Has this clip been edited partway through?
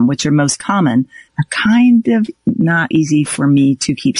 yes; 2 cuts; at 1.3 s, 2.9 s

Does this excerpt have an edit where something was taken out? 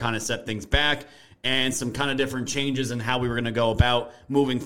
no; 0 cuts

